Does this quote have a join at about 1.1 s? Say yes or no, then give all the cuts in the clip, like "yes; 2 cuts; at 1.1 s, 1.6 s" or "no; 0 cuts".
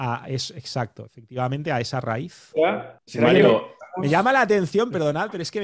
no; 1 cut; at 3.0 s